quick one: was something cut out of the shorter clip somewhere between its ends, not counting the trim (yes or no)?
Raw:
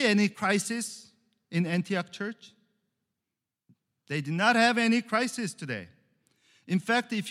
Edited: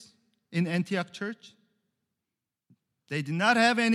no